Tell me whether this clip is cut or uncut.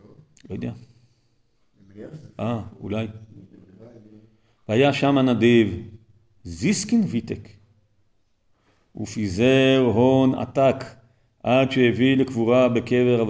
uncut